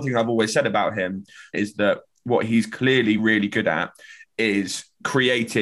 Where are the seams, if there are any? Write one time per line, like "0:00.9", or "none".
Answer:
0:01.5
0:03.2